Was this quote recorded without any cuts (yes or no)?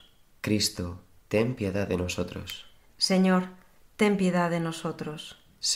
yes